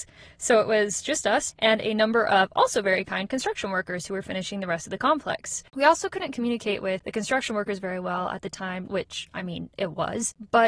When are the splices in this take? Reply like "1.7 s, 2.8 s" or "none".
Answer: 1.5 s, 8.9 s